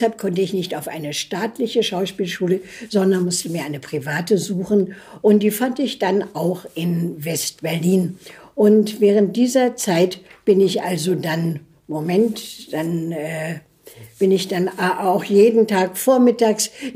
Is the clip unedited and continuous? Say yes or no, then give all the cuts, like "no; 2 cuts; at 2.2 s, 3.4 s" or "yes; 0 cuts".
yes; 0 cuts